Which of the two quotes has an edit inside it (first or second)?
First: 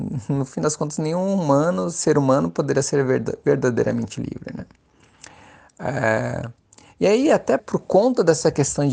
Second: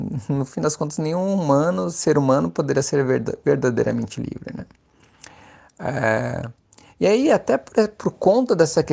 first